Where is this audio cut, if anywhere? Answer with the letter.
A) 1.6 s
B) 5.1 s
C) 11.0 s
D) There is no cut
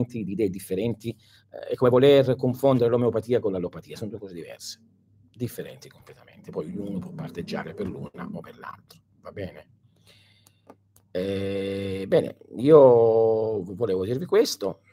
D